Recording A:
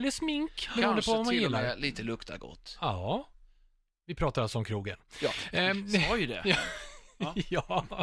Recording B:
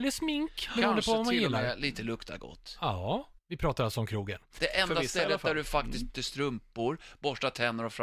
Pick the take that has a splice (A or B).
B